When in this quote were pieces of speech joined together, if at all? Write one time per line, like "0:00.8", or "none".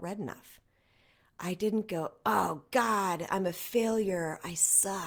none